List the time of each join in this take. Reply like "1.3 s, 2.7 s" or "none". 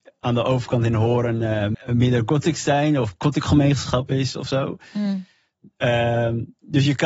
1.7 s